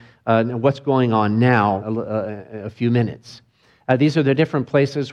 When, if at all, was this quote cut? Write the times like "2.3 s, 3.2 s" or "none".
1.8 s